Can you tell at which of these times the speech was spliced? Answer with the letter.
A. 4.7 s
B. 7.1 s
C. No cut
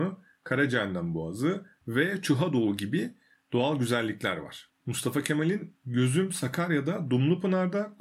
A